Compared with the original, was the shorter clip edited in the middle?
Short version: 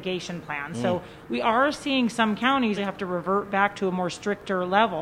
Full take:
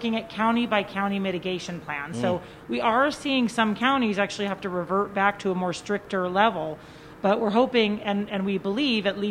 yes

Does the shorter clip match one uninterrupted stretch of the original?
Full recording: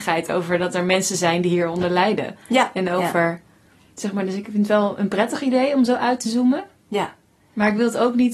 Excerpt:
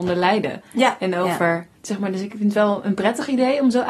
no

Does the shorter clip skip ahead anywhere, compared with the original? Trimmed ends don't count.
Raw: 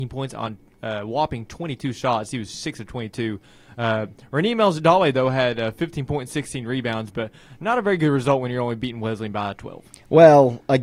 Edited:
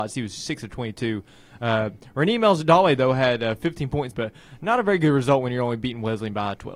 yes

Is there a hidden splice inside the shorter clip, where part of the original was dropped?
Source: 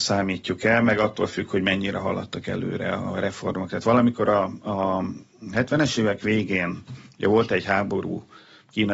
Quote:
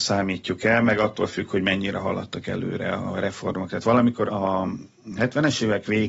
yes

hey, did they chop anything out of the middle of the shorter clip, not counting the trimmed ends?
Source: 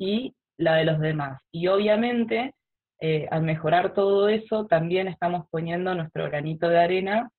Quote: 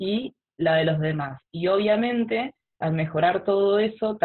yes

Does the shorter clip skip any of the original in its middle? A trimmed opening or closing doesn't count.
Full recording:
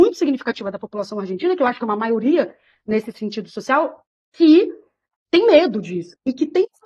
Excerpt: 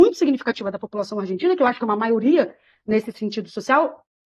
no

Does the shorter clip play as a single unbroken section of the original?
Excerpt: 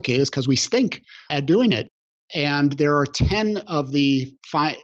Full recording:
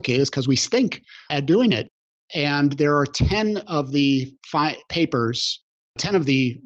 yes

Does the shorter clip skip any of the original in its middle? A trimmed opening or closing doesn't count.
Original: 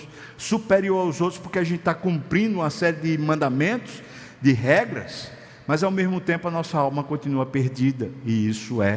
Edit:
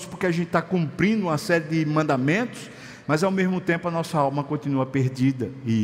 yes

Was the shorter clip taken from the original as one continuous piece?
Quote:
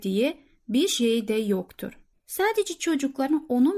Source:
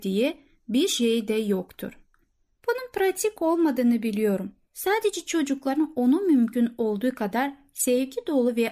no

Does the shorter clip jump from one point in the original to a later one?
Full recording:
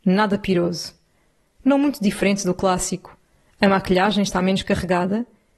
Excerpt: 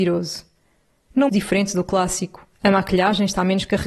yes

